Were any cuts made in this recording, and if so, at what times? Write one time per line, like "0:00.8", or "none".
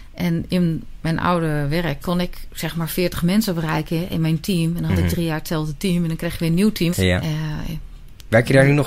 0:06.9